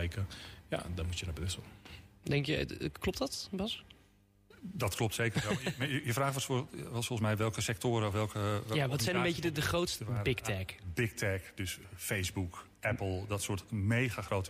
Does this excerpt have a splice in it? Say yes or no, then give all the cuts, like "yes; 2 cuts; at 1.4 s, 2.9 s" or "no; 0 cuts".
yes; 1 cut; at 10.0 s